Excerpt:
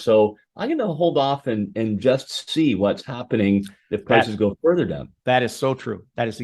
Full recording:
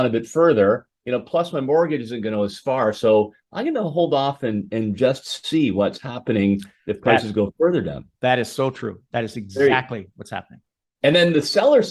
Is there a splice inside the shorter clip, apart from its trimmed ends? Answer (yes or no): no